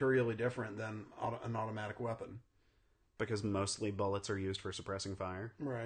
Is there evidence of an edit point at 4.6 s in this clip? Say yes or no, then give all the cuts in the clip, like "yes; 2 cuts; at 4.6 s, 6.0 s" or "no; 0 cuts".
no; 1 cut; at 3.2 s